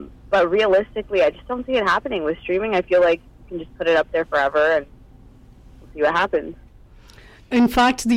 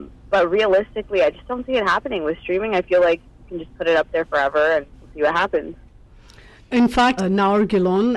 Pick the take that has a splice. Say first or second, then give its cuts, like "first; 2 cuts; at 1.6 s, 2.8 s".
second; 2 cuts; at 4.9 s, 7.2 s